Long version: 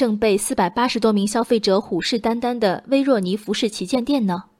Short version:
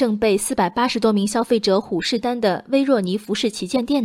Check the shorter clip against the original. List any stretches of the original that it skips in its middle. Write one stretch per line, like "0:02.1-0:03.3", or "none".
0:02.2-0:02.4